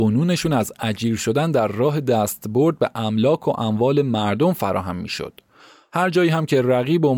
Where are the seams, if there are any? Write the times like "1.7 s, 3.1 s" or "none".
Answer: none